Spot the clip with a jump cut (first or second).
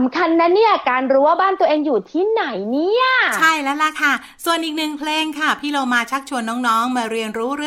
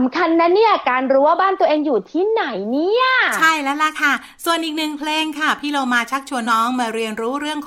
second